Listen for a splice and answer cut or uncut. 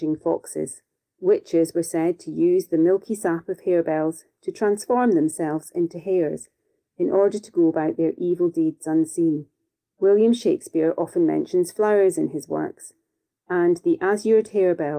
uncut